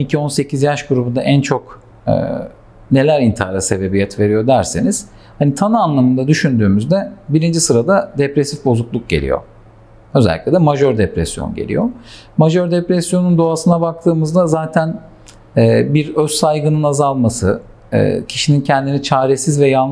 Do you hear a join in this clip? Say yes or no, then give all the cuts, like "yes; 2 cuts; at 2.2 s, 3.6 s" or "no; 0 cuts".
no; 0 cuts